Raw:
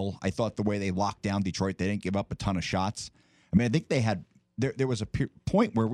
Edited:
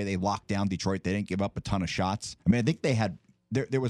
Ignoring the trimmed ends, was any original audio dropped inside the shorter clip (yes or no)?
yes